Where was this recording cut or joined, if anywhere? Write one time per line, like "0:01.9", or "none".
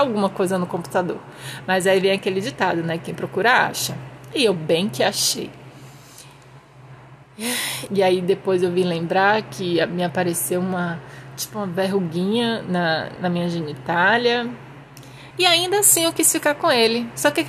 0:07.9
0:13.2
0:15.3

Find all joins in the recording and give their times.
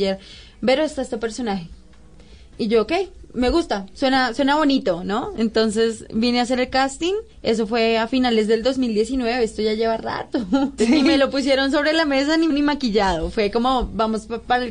0:07.3
0:10.8
0:12.5

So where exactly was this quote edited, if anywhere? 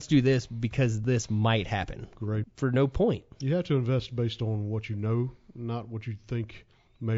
0:02.4

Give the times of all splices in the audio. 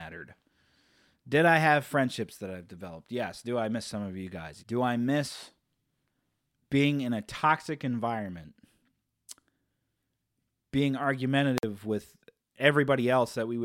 0:04.6

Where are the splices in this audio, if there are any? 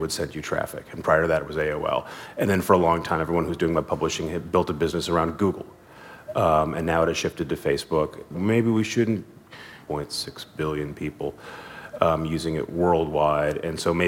0:08.3
0:09.9

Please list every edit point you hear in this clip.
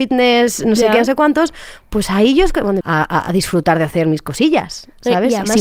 0:02.8

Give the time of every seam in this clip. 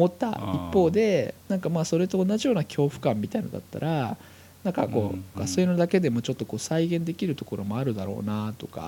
0:05.3

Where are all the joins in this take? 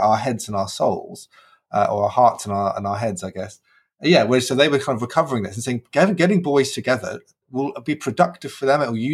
none

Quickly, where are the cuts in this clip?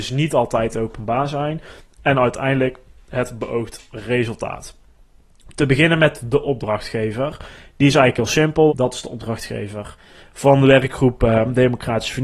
0:08.7

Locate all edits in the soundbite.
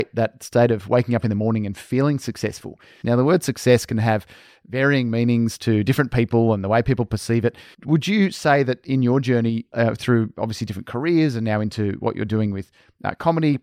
0:03.0
0:07.7

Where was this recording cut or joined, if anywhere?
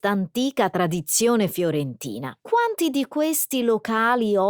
0:02.4

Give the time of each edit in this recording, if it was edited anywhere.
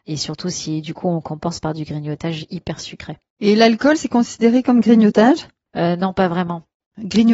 none

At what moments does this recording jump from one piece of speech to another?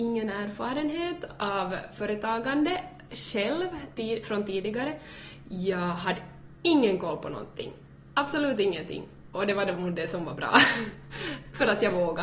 none

